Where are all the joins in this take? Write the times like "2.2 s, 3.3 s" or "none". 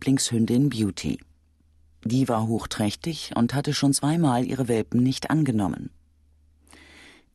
none